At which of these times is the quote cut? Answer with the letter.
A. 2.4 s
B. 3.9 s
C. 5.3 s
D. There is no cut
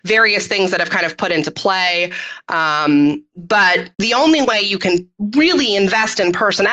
B